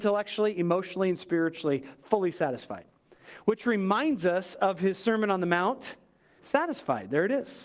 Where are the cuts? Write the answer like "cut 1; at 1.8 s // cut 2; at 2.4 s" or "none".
cut 1; at 6.4 s